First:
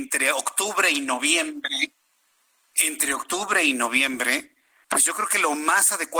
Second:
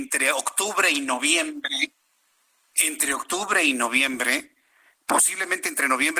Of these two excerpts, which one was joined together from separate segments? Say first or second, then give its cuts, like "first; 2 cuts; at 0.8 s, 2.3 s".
first; 1 cut; at 4.8 s